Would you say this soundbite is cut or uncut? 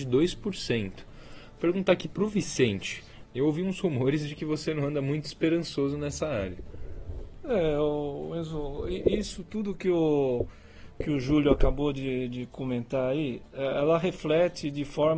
cut